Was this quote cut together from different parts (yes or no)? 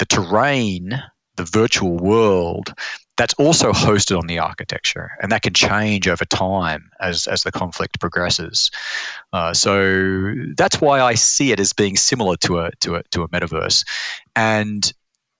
no